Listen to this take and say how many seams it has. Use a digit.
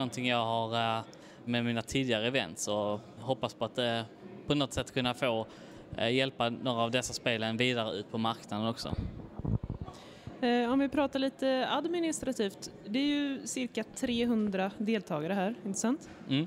1